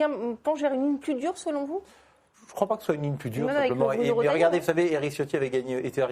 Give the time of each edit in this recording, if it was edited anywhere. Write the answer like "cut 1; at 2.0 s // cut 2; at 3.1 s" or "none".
none